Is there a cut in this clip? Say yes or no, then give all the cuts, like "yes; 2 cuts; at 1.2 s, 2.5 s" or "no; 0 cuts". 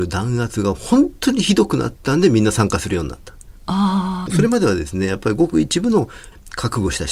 yes; 1 cut; at 3.6 s